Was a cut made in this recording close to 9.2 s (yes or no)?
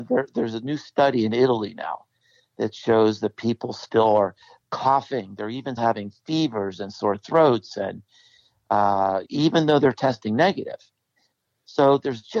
yes